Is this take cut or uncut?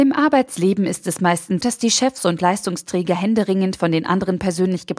cut